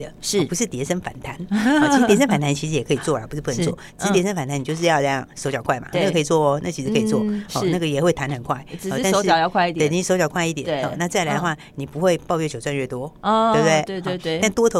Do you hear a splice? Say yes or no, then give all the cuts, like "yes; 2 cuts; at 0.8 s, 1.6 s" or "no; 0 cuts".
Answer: no; 0 cuts